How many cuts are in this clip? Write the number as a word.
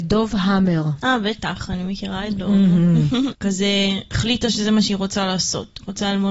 one